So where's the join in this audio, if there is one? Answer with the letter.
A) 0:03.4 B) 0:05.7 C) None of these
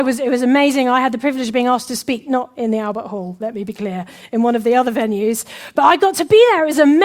C